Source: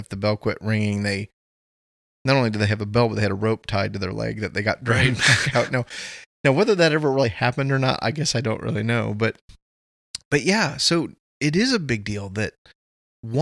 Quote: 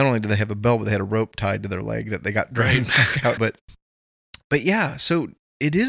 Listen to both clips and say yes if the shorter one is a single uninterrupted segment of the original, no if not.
no